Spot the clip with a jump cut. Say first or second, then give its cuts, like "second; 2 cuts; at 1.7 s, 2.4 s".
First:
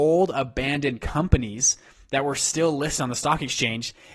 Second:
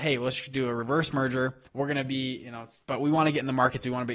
second; 2 cuts; at 1.7 s, 2.8 s